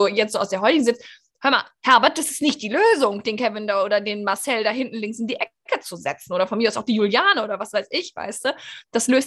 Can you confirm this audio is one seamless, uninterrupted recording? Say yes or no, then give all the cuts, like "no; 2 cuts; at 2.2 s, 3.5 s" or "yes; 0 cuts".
yes; 0 cuts